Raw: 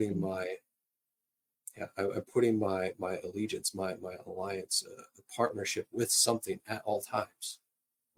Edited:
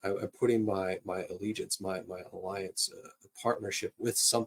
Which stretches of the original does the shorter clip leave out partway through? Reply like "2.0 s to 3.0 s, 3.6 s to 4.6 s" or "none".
none